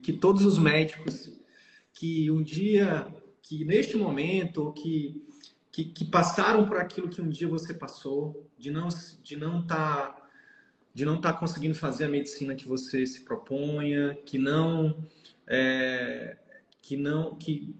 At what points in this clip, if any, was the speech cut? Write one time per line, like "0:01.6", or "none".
none